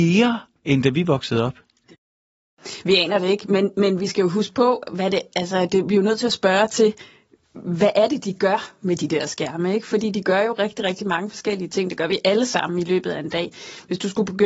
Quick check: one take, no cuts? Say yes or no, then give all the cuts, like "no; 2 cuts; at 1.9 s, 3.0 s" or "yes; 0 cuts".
yes; 0 cuts